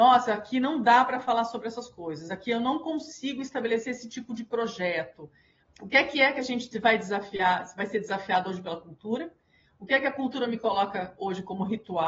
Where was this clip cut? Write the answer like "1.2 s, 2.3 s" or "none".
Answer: 5.6 s